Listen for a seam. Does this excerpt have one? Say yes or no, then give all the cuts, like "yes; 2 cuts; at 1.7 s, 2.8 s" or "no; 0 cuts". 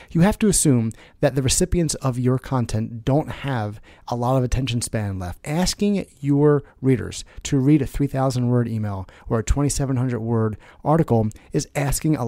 yes; 1 cut; at 5.4 s